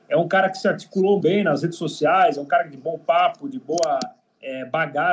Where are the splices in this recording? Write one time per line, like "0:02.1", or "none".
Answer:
0:01.2